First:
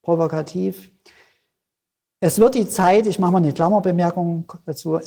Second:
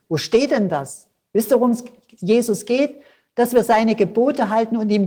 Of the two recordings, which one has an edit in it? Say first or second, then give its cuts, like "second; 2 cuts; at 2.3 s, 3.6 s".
second; 1 cut; at 1.3 s